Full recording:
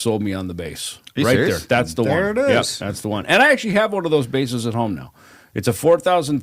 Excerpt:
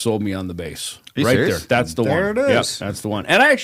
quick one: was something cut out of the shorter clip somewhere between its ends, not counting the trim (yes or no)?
no